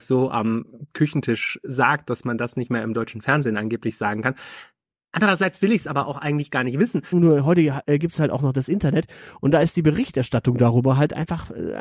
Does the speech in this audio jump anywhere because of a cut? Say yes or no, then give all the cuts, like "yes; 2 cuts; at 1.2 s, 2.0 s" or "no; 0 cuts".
yes; 1 cut; at 7.1 s